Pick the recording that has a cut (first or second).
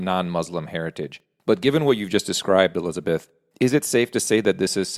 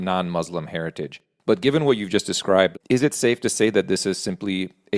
second